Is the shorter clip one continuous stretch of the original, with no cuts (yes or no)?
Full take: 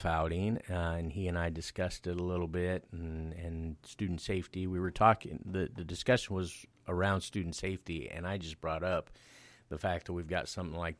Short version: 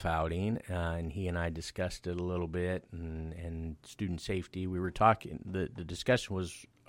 yes